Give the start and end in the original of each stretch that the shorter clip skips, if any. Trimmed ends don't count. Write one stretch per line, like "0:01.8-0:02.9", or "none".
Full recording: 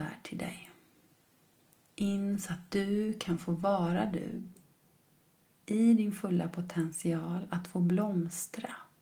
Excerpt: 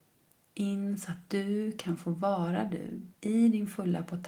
0:04.6-0:05.6